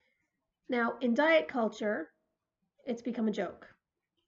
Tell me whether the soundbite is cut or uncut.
uncut